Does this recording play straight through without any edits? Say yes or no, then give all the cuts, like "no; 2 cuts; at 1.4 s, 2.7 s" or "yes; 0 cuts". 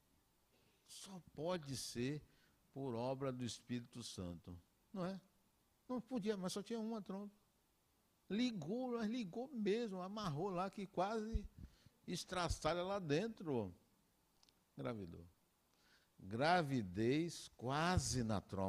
yes; 0 cuts